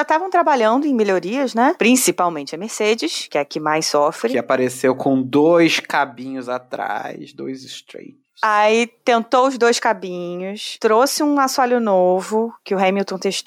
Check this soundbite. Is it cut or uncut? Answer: uncut